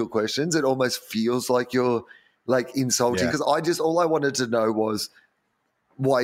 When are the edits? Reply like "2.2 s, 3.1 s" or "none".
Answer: 3.3 s